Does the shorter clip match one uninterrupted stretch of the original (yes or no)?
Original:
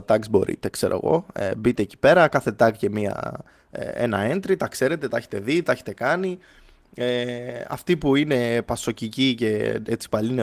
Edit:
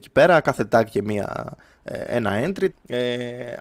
no